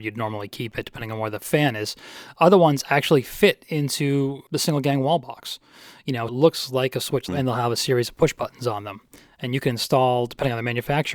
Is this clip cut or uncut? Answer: cut